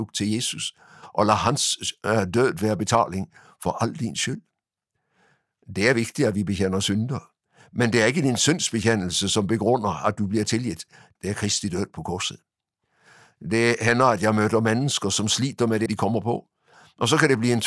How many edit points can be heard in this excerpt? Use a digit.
2